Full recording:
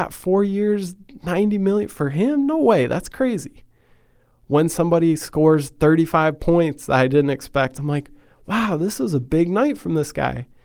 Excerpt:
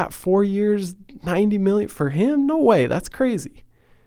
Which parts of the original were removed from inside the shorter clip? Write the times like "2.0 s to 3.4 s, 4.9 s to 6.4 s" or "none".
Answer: none